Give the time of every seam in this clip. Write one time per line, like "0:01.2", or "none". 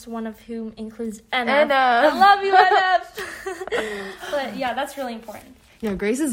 none

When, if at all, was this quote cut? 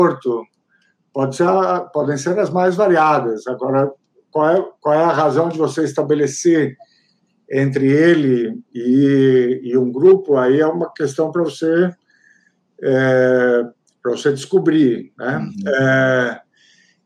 none

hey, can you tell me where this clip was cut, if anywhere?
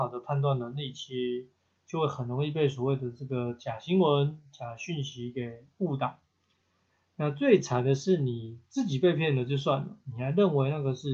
none

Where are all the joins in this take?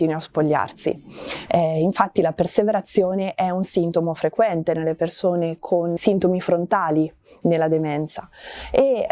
0:01.5
0:06.0

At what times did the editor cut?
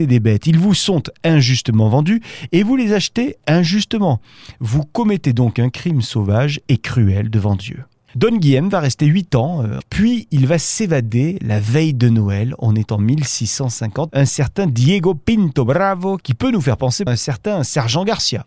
0:09.8
0:14.1
0:17.1

